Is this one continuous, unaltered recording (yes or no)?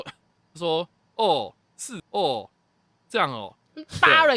no